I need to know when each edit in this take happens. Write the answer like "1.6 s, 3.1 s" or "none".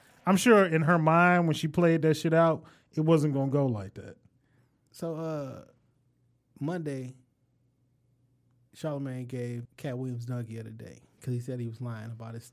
9.6 s